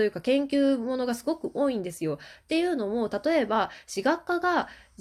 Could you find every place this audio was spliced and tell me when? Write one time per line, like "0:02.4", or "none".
none